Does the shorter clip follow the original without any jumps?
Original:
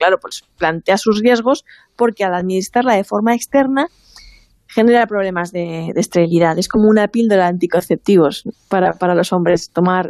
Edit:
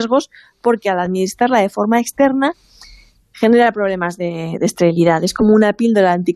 yes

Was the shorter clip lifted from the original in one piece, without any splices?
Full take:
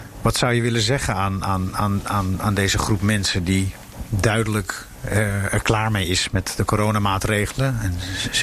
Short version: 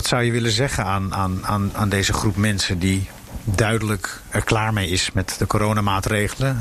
no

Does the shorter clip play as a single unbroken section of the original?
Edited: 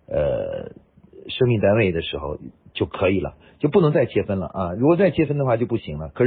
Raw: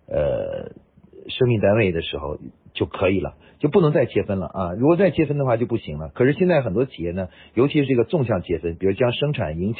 yes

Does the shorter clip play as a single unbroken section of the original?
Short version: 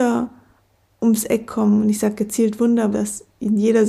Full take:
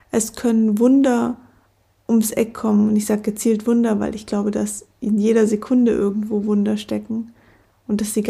no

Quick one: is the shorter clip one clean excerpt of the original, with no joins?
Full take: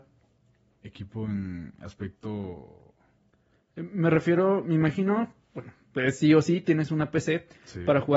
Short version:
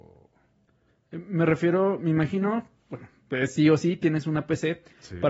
yes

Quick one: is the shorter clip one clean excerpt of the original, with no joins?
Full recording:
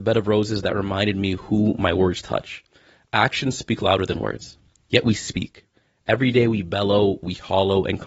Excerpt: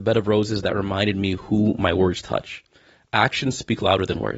yes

